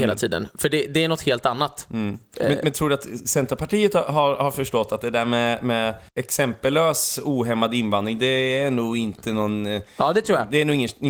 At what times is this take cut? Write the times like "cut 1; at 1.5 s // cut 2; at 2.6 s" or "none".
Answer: cut 1; at 6.1 s